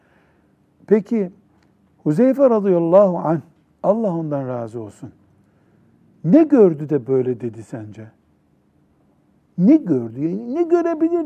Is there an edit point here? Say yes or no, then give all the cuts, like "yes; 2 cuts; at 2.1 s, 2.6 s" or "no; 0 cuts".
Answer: no; 0 cuts